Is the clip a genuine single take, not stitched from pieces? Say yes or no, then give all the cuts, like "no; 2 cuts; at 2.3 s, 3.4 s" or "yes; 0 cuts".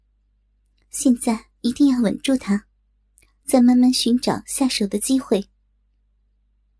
yes; 0 cuts